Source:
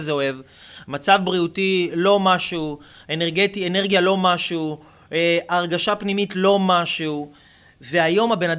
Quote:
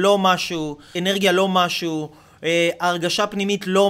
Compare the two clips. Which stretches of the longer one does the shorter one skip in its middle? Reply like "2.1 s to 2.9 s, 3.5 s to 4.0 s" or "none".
3.0 s to 3.6 s